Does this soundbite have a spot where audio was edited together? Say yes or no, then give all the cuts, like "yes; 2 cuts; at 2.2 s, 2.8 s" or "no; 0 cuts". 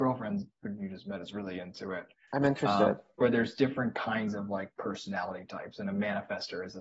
no; 0 cuts